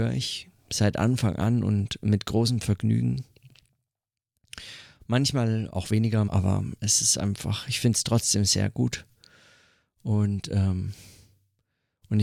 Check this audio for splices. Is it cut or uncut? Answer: cut